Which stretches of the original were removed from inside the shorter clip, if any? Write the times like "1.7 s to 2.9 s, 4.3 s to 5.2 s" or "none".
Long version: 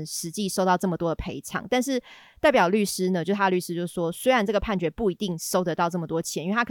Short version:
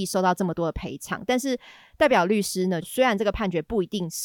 3.3 s to 4.1 s